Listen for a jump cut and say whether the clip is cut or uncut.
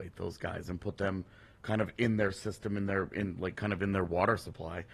uncut